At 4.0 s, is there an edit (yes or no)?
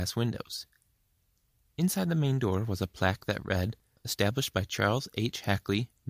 yes